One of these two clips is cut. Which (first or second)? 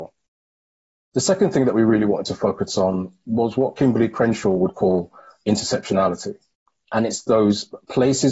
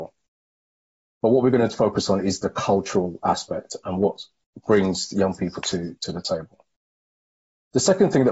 first